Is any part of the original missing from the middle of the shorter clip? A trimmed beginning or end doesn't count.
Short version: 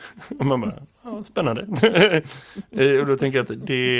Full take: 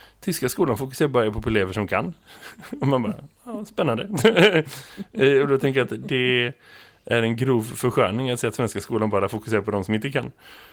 no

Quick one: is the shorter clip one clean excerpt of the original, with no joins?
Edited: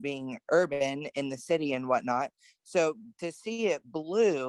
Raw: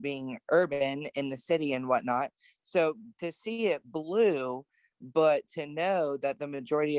yes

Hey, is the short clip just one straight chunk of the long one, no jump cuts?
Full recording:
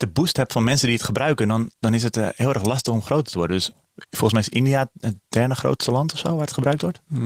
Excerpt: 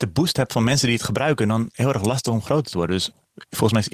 no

